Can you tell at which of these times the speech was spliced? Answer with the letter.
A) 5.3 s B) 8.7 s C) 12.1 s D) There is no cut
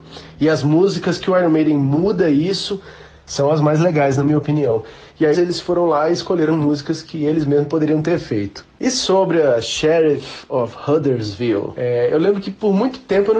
A